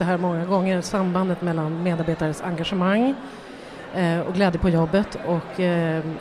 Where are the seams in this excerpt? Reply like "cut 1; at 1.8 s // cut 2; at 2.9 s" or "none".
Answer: none